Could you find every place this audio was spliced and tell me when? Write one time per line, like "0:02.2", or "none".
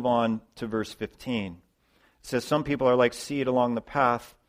none